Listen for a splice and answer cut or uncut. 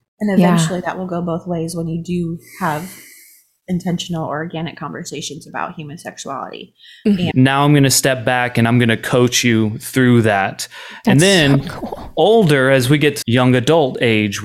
cut